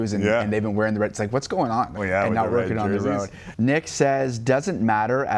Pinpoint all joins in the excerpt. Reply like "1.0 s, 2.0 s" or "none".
2.0 s, 3.5 s